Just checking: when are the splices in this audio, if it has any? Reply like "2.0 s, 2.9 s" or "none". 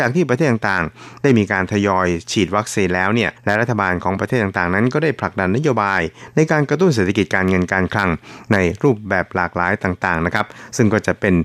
3.4 s